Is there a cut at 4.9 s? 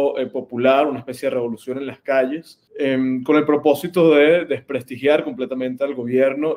no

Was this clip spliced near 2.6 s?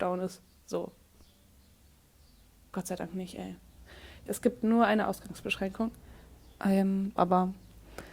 no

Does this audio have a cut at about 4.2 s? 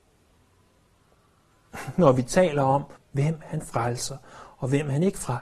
no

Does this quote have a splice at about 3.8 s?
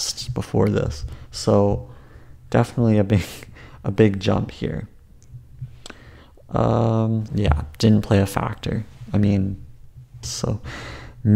no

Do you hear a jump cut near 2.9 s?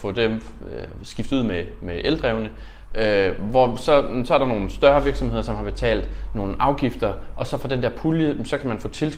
yes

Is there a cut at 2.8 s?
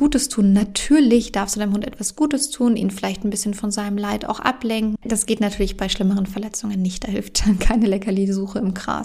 yes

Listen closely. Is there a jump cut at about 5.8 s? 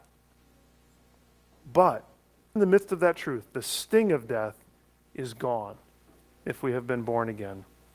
no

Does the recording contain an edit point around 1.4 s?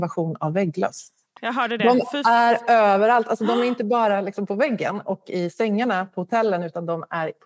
yes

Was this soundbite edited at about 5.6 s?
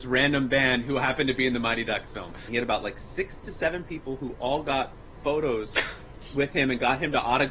no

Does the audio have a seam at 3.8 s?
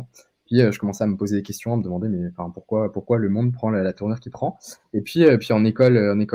no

